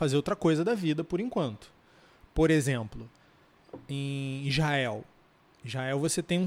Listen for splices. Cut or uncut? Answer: uncut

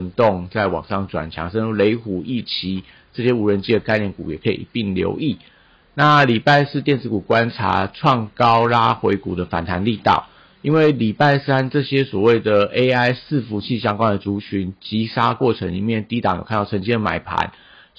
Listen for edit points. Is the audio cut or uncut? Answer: uncut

